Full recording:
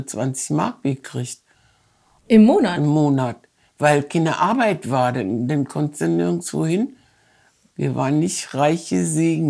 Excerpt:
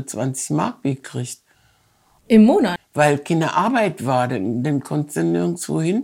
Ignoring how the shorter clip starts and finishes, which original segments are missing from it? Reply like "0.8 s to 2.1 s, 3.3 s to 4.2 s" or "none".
2.8 s to 3.6 s